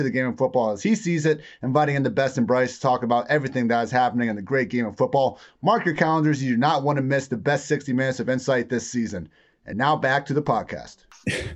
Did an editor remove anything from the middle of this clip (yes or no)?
no